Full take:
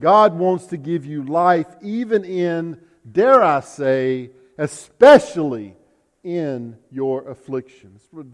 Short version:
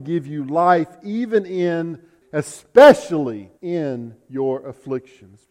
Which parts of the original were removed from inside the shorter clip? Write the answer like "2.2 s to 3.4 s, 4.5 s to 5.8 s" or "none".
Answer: 3.0 s to 4.5 s, 5.8 s to 6.2 s